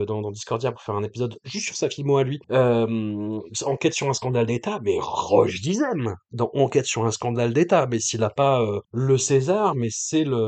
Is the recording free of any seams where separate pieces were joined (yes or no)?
no